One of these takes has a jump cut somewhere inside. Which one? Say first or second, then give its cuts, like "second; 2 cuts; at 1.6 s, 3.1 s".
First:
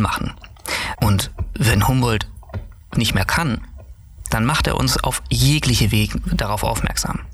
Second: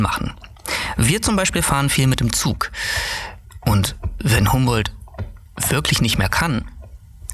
first; 2 cuts; at 1.0 s, 3.0 s